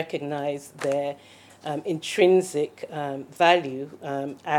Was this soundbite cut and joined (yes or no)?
no